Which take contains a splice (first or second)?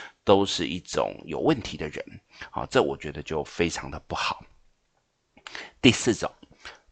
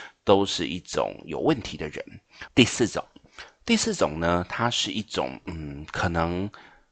second